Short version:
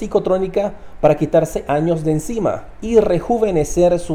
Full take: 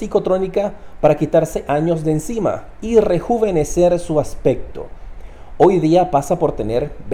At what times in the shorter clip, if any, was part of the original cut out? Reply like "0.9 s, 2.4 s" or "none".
none